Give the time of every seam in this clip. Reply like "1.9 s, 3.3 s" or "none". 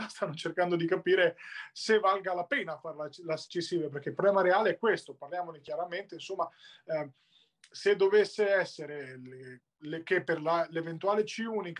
none